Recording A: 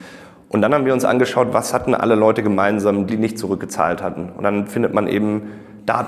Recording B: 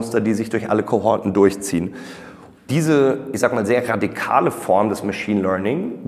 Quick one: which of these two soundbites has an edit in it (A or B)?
A